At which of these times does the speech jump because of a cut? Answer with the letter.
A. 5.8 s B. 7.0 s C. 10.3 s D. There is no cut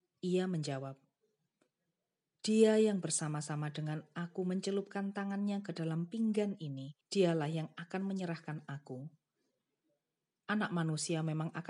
B